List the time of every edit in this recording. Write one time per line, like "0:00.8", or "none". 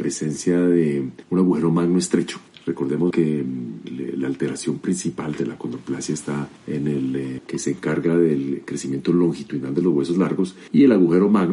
0:03.1
0:07.4

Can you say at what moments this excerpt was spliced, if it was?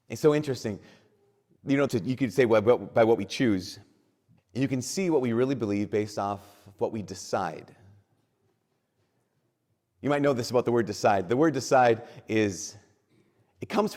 0:01.9
0:04.4

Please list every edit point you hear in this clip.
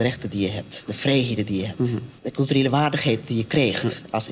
0:02.2

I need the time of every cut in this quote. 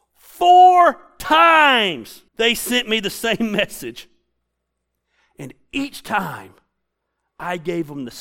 0:02.3

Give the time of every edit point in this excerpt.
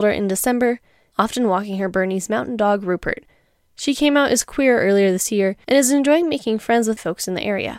0:01.1

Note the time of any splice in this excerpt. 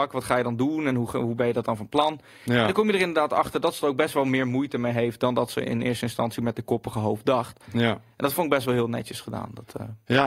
none

